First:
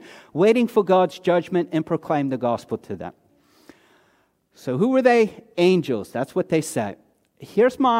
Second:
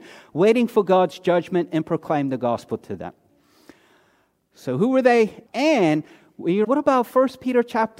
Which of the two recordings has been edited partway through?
second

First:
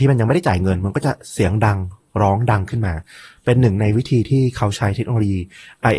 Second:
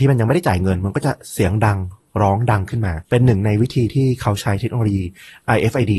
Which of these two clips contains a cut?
second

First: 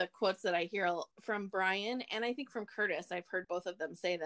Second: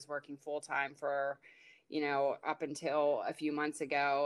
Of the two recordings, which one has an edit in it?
first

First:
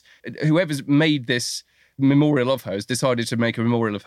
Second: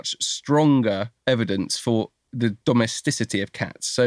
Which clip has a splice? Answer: second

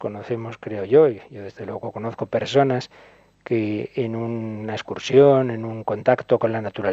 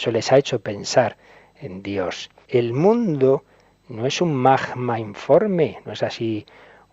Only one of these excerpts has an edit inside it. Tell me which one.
second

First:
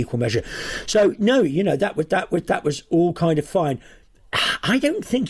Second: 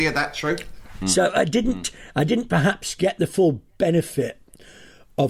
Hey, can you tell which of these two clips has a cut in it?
second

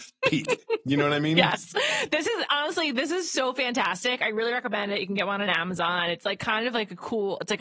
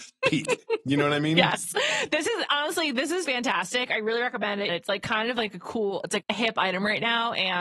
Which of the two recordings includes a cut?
second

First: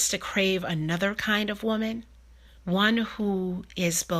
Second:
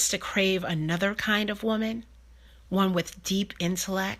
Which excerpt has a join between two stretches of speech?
first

